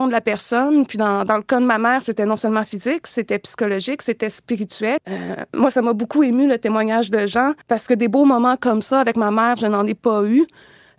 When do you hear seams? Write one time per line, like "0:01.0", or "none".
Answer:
0:05.0
0:07.6